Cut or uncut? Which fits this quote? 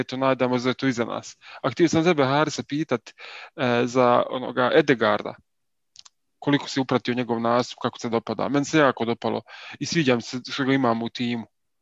uncut